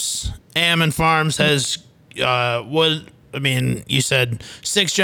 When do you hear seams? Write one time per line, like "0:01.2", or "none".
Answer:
none